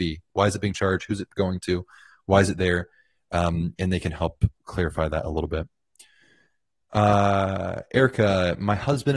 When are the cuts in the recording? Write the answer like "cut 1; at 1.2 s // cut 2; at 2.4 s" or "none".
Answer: none